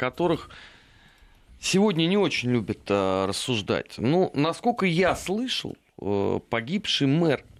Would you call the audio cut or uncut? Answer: uncut